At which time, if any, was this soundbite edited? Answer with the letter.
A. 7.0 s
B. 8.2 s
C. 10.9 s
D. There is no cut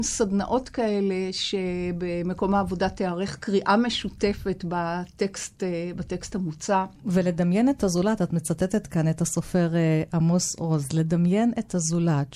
A